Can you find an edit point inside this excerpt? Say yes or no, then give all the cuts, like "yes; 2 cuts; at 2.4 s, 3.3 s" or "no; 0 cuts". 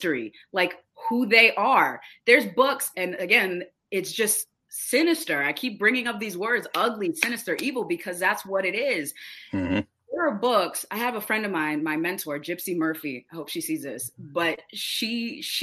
yes; 1 cut; at 2.9 s